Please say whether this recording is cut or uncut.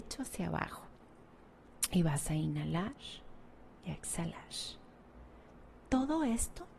uncut